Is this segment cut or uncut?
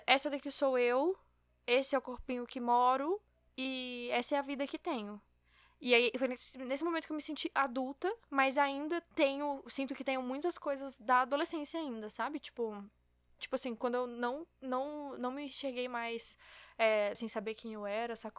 cut